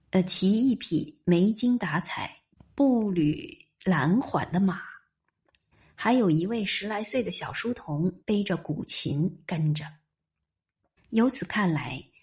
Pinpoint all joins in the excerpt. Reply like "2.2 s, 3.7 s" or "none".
8.2 s

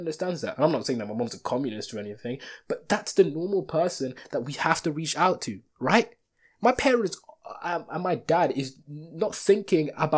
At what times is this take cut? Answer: 5.7 s

